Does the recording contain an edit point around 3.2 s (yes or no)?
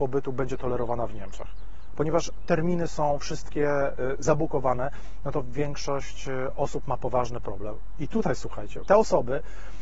no